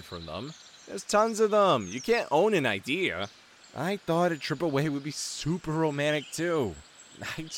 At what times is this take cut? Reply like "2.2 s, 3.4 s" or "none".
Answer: none